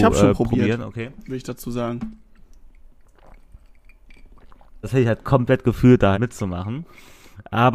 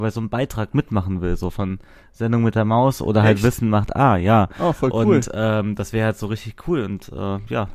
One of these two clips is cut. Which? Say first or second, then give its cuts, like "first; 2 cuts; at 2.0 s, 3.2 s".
first; 2 cuts; at 4.8 s, 6.1 s